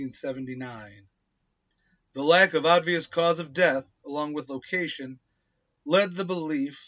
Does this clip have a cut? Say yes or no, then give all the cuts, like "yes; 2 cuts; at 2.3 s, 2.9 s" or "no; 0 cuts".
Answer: no; 0 cuts